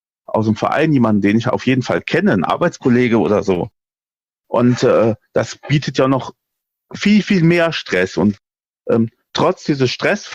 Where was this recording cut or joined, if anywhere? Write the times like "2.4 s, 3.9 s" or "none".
none